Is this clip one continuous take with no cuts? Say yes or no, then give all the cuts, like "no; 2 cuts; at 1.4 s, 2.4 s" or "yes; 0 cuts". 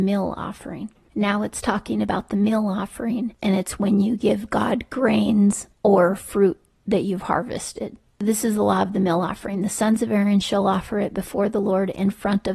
no; 1 cut; at 3.4 s